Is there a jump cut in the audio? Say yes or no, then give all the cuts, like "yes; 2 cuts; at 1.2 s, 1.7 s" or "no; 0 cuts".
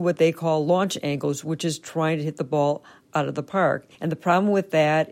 yes; 1 cut; at 3.9 s